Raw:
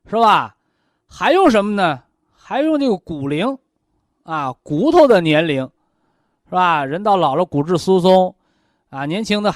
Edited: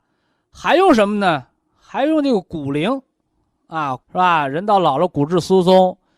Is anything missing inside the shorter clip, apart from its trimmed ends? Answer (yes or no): yes